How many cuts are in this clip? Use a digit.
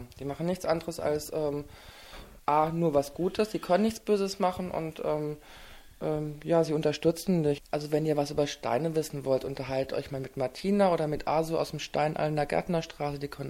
2